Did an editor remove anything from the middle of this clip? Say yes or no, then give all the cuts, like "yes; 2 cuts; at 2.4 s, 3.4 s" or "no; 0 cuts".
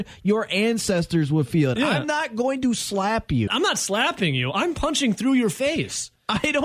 yes; 1 cut; at 3.5 s